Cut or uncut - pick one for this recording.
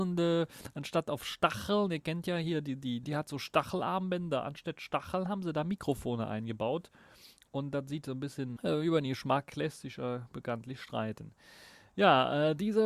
cut